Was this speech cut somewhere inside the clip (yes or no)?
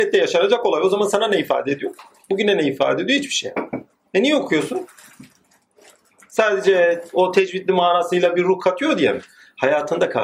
no